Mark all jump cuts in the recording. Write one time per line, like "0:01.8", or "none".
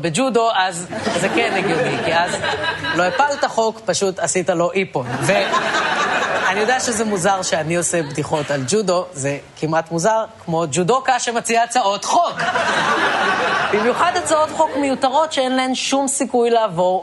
none